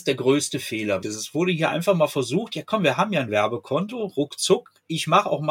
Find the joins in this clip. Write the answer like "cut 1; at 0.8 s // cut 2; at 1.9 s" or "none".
cut 1; at 1.0 s

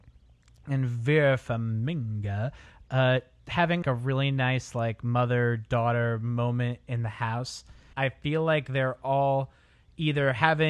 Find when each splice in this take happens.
cut 1; at 3.8 s // cut 2; at 7.9 s

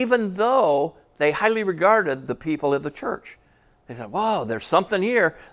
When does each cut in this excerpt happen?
none

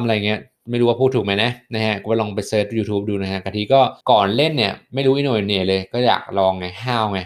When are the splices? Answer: cut 1; at 4.0 s

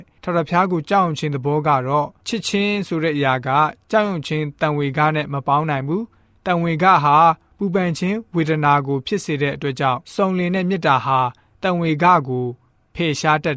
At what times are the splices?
cut 1; at 10.0 s

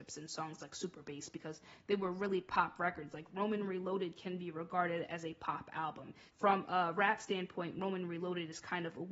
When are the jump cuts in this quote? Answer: cut 1; at 6.3 s

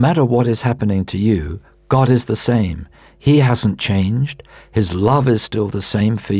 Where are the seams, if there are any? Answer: none

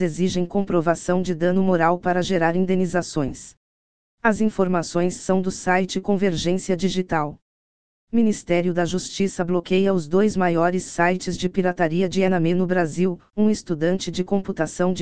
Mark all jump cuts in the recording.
cut 1; at 4.1 s

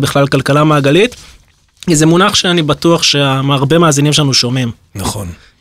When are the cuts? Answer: none

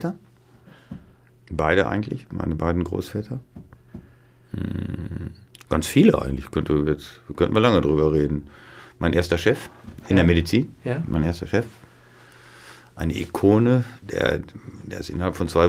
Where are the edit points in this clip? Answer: none

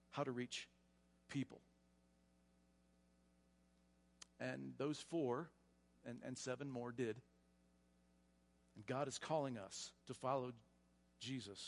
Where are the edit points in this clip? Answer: cut 1; at 5.9 s // cut 2; at 8.6 s // cut 3; at 10.0 s

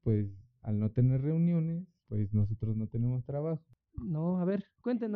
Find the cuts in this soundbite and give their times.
cut 1; at 3.7 s

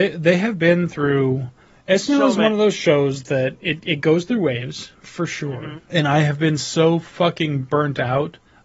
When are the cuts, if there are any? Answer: cut 1; at 5.9 s

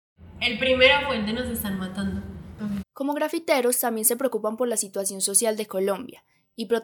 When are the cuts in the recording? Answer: cut 1; at 2.8 s

